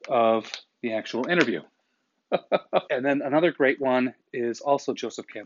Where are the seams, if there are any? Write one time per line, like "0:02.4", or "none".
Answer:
0:02.9

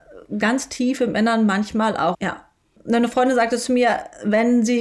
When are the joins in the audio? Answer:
0:02.1

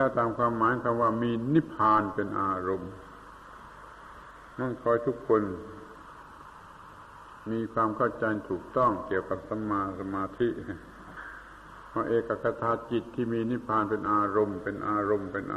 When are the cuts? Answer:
0:01.7

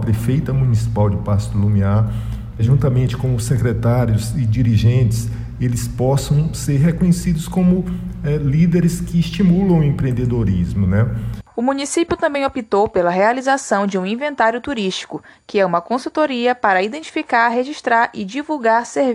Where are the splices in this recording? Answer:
0:02.6

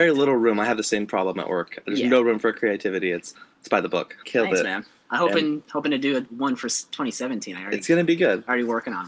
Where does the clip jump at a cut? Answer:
0:04.2

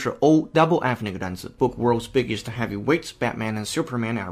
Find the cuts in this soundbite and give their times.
0:01.6

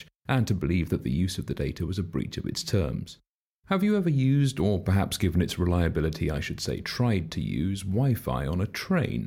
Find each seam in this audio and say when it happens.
0:03.5

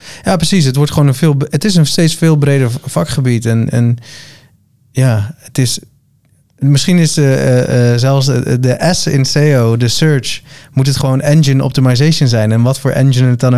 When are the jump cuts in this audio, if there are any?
none

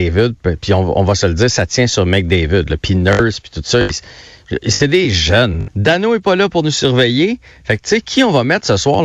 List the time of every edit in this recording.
0:05.7

